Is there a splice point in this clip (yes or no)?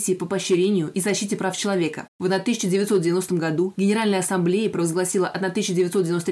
yes